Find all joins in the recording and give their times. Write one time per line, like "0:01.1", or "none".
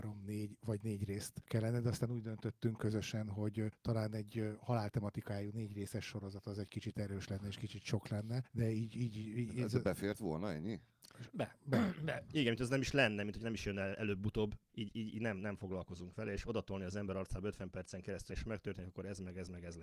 0:12.3
0:14.7
0:18.3